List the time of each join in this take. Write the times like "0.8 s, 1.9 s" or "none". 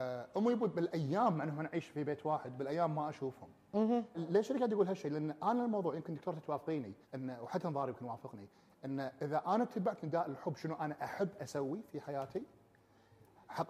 4.1 s, 7.0 s